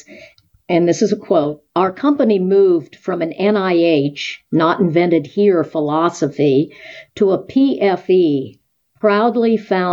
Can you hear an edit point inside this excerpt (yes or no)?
no